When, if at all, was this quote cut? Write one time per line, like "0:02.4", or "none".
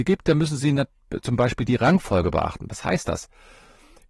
none